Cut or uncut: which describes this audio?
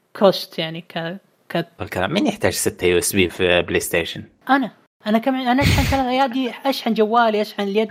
cut